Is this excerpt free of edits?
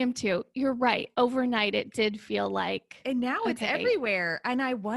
yes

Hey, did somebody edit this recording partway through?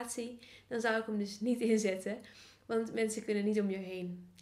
no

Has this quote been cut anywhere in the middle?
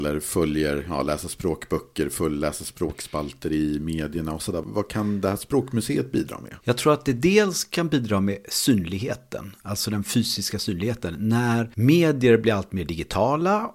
no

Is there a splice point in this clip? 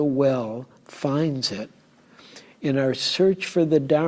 no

